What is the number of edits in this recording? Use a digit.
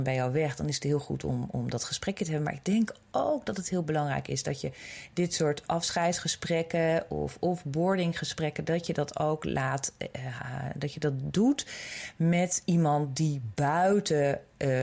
0